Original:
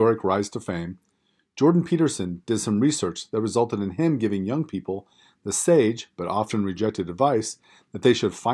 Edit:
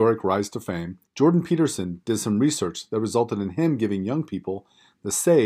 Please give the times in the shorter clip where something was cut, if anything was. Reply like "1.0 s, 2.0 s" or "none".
1.1 s